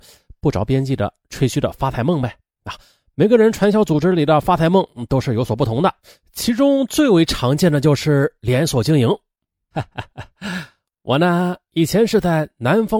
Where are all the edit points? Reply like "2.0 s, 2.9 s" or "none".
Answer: 9.7 s

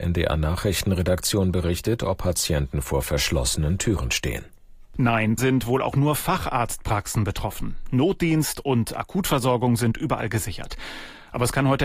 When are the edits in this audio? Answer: 5.4 s

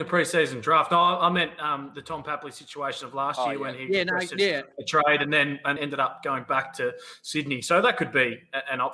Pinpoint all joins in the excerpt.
5.8 s

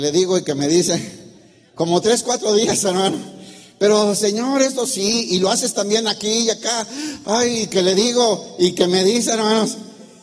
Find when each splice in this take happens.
none

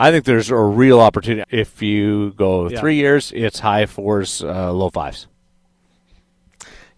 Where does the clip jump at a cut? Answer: 1.4 s

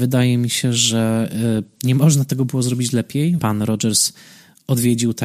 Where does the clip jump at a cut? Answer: 3.4 s

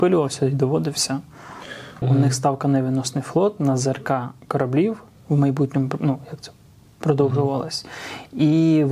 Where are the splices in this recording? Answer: 2.0 s

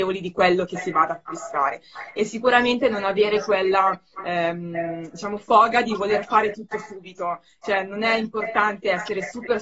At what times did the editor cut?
none

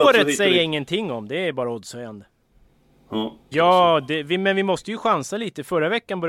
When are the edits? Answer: 3.5 s

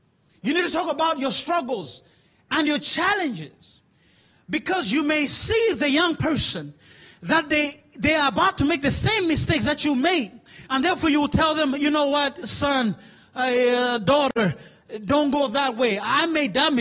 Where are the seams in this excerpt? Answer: none

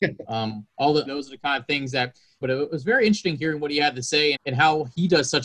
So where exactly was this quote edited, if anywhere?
1.1 s, 2.4 s, 4.4 s

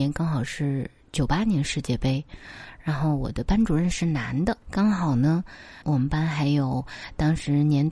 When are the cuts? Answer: 4.6 s, 5.8 s

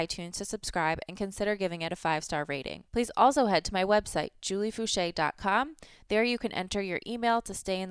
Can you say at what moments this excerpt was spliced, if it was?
2.9 s

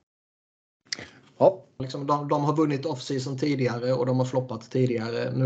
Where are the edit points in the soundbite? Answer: 1.8 s

